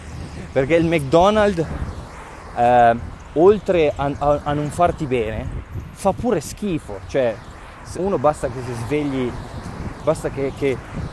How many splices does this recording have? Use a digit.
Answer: 1